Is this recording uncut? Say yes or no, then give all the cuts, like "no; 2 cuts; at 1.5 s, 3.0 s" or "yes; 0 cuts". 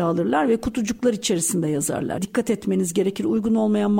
no; 1 cut; at 2.2 s